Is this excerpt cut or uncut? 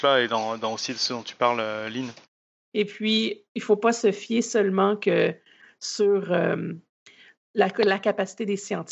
cut